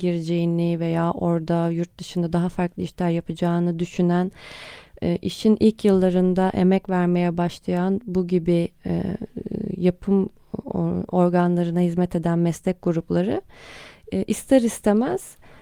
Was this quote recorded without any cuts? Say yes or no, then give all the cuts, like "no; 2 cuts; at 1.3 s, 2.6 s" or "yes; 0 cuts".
no; 1 cut; at 8.8 s